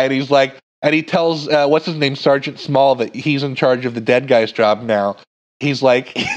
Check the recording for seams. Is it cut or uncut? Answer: uncut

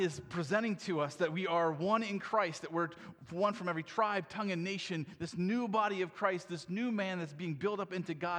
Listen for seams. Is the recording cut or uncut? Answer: uncut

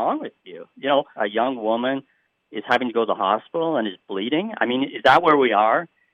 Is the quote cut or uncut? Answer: cut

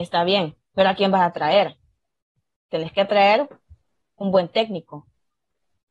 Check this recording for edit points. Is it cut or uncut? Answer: uncut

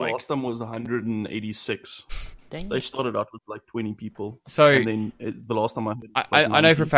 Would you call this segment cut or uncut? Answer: uncut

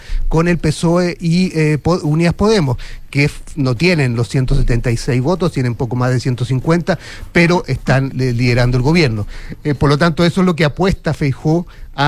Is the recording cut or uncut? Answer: cut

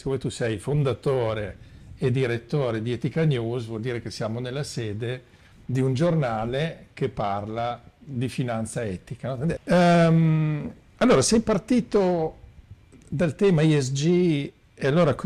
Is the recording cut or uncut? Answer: cut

